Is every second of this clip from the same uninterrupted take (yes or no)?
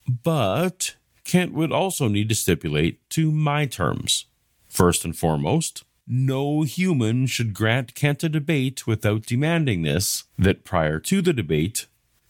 no